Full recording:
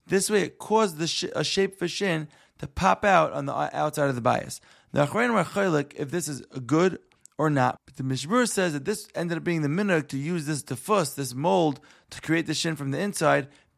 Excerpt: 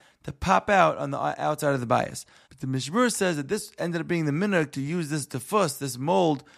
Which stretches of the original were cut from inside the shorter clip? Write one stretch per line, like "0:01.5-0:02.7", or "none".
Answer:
0:04.8-0:07.8